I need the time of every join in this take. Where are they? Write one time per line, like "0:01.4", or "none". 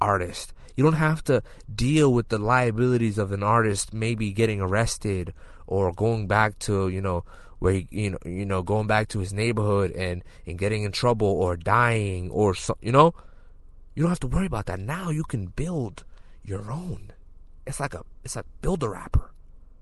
none